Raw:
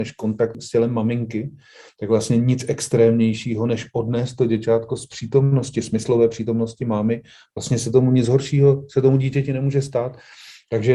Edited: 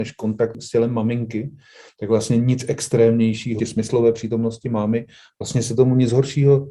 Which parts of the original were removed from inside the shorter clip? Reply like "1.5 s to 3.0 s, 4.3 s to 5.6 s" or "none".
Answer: 3.6 s to 5.7 s